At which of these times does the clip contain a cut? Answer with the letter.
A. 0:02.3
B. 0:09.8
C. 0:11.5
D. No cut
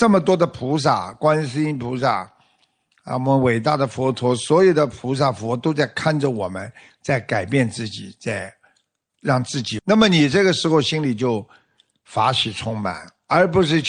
B